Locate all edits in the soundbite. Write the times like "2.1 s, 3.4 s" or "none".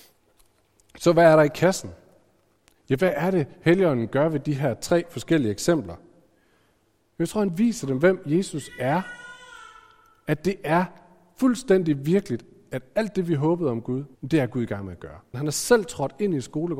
14.1 s, 15.3 s